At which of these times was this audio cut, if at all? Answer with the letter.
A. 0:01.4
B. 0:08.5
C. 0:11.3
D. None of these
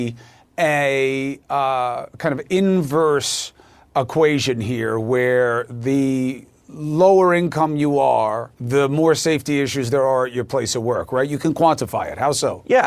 B